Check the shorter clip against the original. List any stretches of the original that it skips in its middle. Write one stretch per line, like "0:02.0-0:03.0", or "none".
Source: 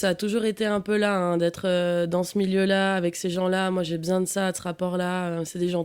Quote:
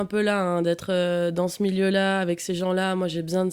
none